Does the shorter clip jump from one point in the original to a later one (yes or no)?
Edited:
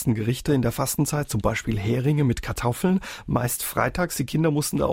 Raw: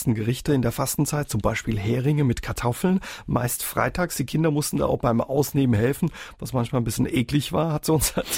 no